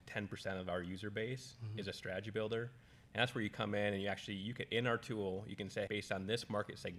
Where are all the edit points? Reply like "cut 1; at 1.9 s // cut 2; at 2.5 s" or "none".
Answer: cut 1; at 5.9 s